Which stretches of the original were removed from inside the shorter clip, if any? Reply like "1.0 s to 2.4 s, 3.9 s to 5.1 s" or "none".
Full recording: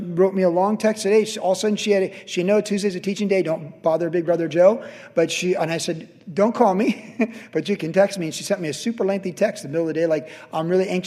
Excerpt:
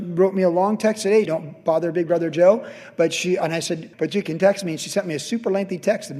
1.3 s to 3.4 s, 6.1 s to 7.5 s

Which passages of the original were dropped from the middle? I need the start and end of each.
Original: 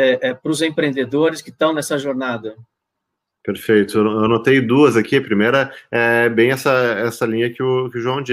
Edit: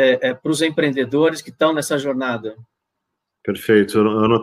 none

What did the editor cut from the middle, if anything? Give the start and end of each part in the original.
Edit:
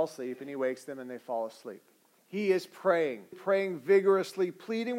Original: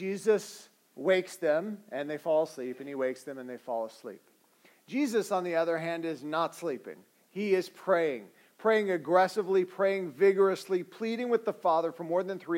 4.6 s to 7.2 s, 8.4 s to 9.6 s

